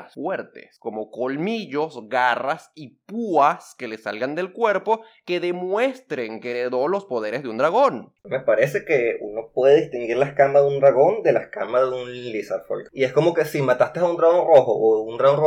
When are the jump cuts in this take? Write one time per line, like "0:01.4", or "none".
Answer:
0:08.2